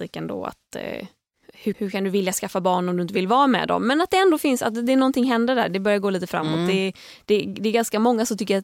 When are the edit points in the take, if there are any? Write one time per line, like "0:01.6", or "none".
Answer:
0:01.7